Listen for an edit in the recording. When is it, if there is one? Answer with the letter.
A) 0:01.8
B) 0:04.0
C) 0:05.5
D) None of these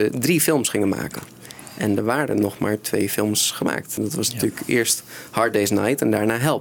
D